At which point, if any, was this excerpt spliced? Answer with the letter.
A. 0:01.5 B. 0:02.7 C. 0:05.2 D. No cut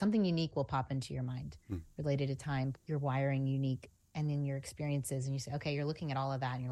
B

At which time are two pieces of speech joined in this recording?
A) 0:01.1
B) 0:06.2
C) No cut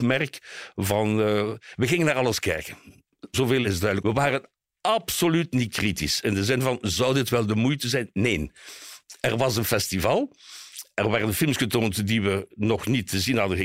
C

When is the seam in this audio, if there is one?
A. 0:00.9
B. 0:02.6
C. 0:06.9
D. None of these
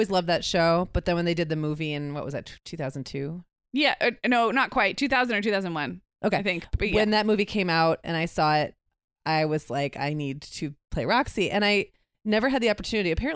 B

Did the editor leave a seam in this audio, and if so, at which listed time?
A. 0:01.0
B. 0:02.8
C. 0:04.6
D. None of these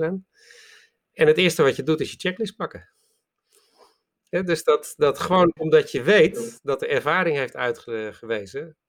D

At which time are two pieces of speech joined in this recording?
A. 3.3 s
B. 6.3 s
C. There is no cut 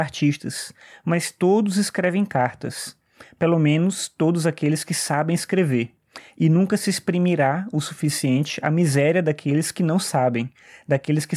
C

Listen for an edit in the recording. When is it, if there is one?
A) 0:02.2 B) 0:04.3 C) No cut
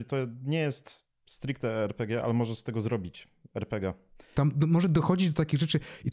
B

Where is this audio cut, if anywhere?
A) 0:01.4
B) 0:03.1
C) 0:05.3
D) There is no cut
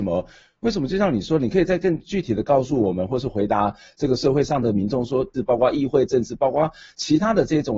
C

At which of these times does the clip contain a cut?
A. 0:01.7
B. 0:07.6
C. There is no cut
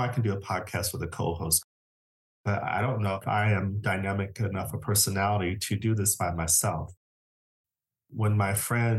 C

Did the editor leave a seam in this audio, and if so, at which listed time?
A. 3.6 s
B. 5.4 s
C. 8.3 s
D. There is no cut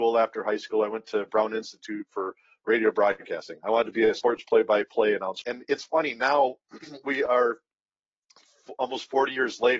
B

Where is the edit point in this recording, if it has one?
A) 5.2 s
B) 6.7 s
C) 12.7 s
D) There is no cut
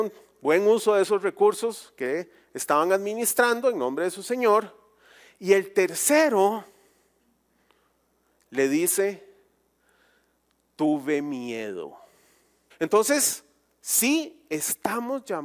C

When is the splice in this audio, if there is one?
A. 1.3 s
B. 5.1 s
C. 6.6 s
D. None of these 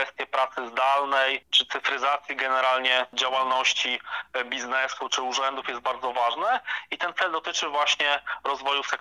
B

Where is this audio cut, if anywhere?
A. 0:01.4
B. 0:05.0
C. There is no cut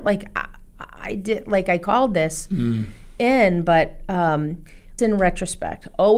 B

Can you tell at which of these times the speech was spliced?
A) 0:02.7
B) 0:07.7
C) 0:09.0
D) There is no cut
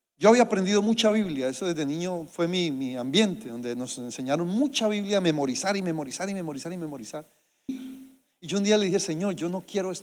B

